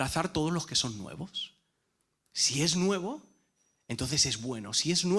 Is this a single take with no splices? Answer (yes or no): yes